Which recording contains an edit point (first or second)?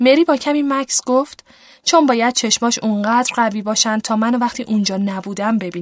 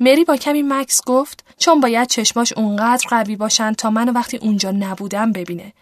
second